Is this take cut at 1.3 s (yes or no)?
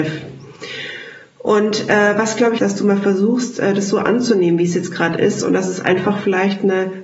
no